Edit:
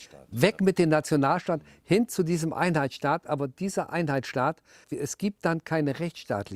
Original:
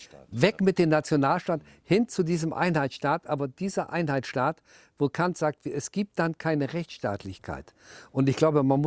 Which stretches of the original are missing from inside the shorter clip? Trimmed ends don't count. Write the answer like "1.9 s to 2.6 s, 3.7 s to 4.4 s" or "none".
4.8 s to 5.6 s